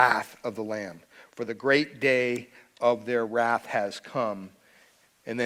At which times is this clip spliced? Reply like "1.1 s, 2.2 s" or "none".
none